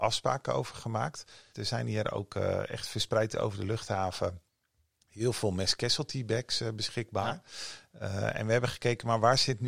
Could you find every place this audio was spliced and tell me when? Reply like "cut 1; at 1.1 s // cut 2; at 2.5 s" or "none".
cut 1; at 1.5 s